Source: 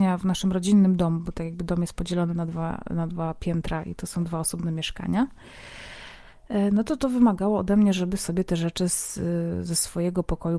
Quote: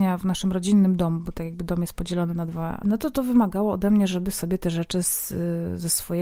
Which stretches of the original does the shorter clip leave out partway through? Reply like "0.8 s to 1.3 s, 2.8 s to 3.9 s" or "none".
2.8 s to 6.7 s